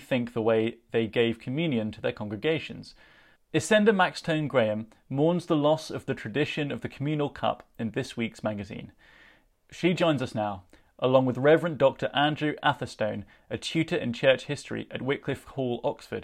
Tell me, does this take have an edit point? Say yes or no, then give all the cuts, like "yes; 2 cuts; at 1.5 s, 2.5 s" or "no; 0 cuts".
yes; 1 cut; at 3.4 s